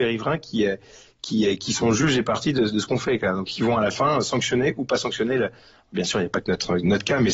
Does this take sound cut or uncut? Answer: uncut